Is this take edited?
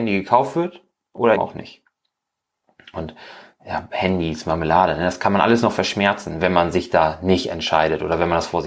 yes; 1 cut; at 1.4 s

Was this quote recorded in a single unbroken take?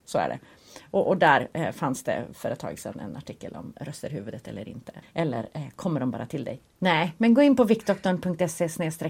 no; 2 cuts; at 5.0 s, 6.7 s

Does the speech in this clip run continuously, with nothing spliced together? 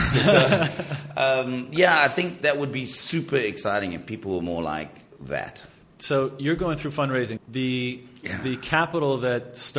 no; 1 cut; at 7.4 s

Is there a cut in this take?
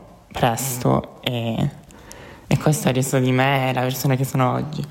no; 0 cuts

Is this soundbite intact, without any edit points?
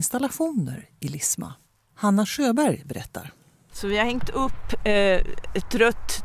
yes; 0 cuts

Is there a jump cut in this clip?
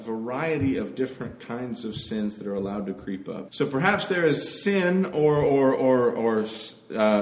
yes; 1 cut; at 3.5 s

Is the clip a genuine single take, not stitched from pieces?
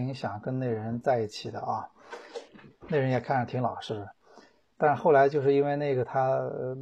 yes; 0 cuts

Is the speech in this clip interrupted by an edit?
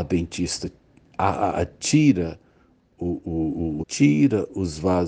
yes; 1 cut; at 3.8 s

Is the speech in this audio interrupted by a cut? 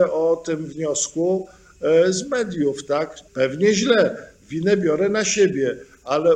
yes; 1 cut; at 3.3 s

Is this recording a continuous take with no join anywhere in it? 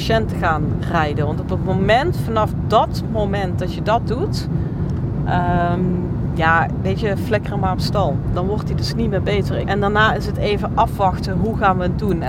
no; 1 cut; at 9.6 s

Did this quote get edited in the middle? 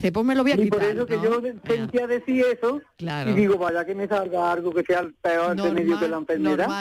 no; 0 cuts

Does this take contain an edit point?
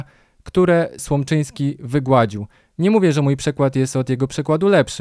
no; 0 cuts

